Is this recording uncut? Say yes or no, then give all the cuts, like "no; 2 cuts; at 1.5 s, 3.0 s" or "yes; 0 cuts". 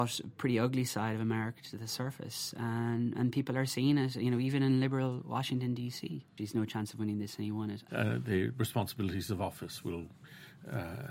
no; 2 cuts; at 6.4 s, 7.9 s